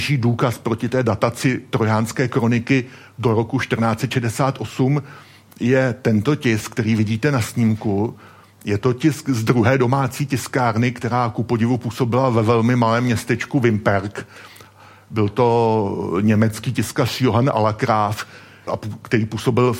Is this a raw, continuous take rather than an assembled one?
no; 1 cut; at 18.7 s

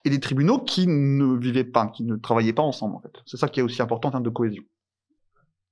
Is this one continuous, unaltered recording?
yes; 0 cuts

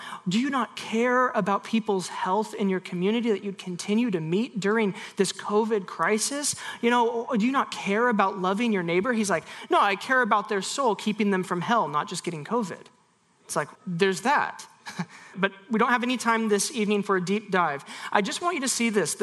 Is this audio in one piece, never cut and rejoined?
no; 2 cuts; at 13.7 s, 15.3 s

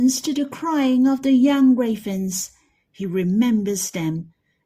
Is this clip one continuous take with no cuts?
yes; 0 cuts

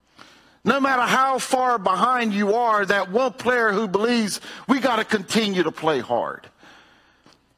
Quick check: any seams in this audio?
no; 0 cuts

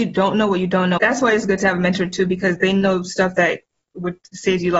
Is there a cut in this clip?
yes; 1 cut; at 1.0 s

